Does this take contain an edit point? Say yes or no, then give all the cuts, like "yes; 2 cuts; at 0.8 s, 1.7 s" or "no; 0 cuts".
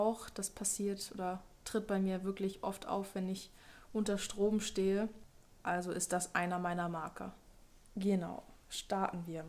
no; 0 cuts